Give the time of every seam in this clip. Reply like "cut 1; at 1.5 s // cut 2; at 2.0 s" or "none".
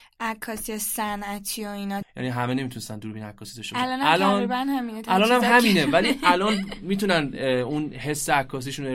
cut 1; at 2.0 s